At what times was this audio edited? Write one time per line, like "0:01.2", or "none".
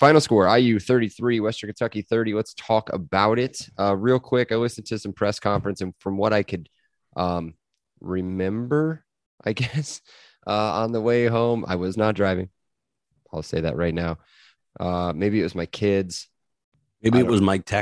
0:14.6